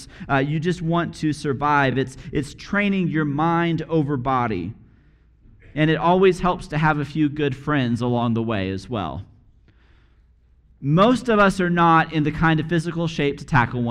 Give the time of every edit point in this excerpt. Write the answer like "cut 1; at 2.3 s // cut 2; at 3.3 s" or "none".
none